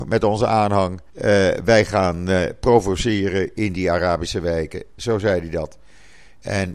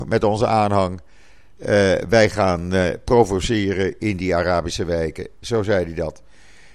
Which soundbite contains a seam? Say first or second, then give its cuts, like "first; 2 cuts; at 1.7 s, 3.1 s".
first; 1 cut; at 1.1 s